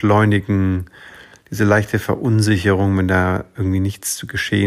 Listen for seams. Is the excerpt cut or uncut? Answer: uncut